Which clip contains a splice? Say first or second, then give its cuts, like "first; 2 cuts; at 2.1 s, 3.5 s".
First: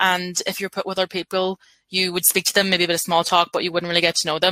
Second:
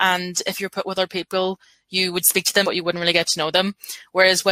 second; 1 cut; at 2.6 s